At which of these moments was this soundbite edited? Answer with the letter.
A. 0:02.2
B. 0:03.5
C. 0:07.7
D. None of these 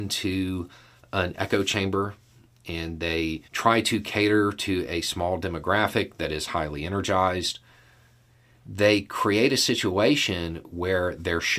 B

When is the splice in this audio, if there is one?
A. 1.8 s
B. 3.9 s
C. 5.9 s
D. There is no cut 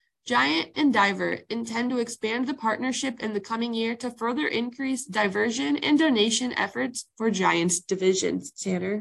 D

